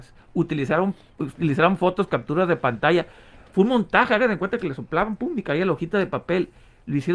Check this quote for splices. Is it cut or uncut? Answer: uncut